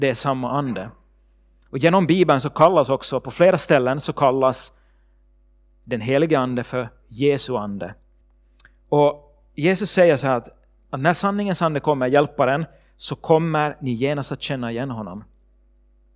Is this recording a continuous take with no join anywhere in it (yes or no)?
yes